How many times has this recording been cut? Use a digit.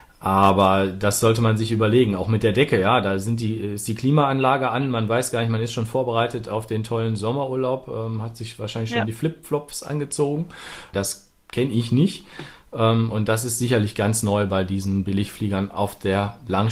1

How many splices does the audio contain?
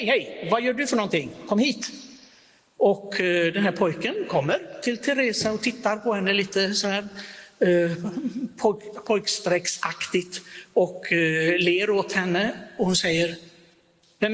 0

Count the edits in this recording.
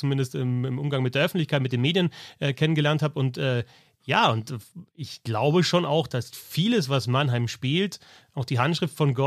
0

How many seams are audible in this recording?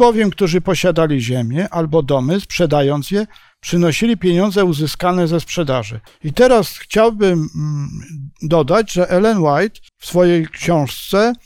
2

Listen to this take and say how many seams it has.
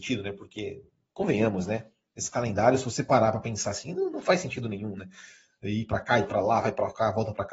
0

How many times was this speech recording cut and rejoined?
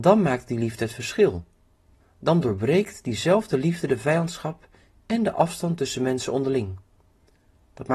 1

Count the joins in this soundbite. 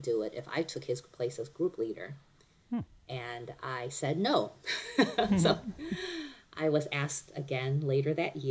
0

